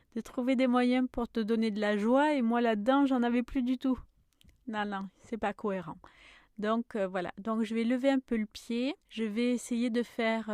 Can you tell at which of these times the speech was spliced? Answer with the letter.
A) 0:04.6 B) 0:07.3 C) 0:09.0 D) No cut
C